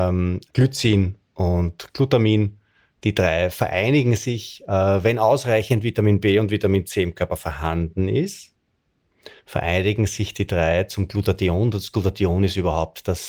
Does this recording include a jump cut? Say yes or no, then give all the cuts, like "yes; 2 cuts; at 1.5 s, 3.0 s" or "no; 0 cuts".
no; 0 cuts